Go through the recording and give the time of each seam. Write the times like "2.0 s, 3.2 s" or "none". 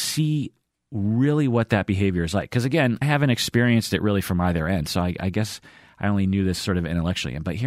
3.0 s